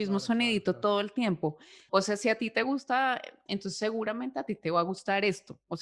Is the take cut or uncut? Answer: cut